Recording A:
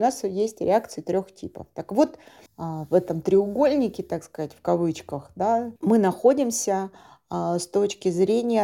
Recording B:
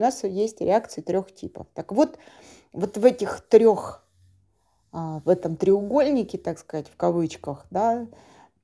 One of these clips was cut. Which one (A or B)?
A